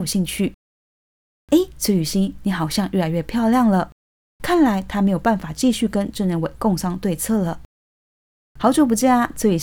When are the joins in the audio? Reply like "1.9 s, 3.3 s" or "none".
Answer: 4.3 s